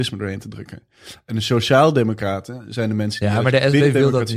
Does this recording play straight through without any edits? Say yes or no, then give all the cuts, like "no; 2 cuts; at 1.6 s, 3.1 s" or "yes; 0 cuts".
yes; 0 cuts